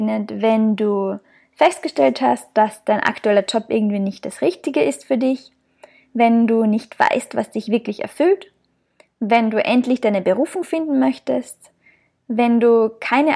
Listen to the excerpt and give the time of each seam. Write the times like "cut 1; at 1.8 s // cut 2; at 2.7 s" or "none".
none